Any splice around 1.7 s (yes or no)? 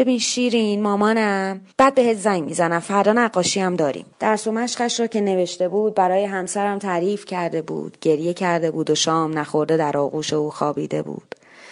yes